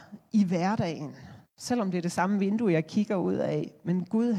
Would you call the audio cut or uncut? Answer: cut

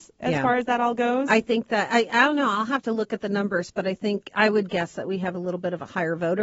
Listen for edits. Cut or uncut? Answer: uncut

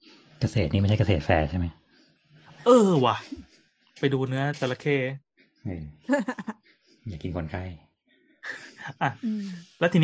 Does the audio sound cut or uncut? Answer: uncut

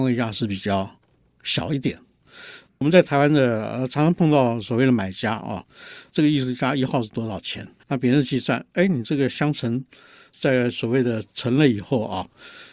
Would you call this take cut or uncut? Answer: cut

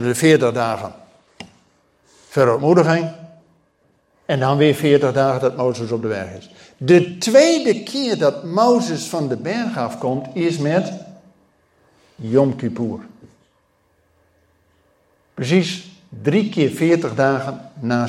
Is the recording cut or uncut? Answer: uncut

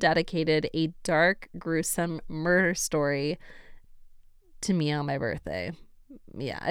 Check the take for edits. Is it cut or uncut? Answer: uncut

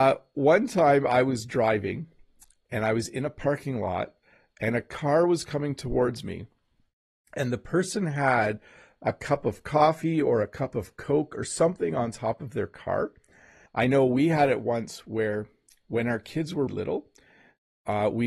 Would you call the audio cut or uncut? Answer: cut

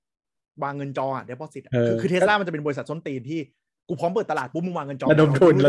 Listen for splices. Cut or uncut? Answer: uncut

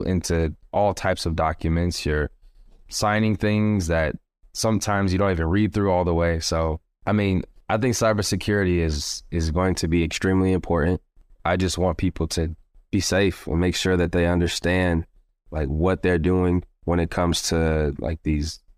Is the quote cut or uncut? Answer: uncut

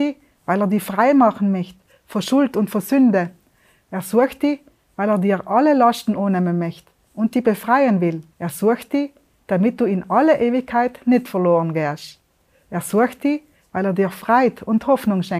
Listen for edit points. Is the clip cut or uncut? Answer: cut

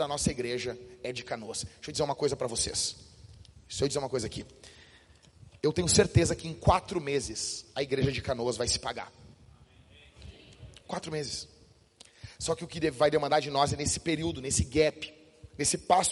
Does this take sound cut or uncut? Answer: uncut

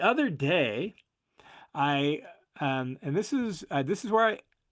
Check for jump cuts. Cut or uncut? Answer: uncut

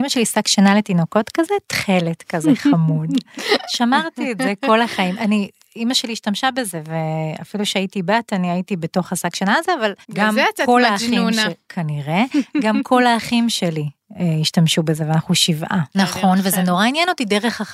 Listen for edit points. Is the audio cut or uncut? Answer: cut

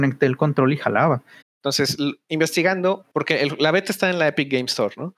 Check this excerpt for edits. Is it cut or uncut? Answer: cut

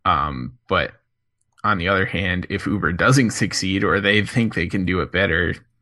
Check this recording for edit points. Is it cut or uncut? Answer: uncut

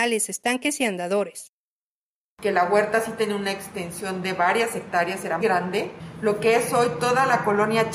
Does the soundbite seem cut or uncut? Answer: cut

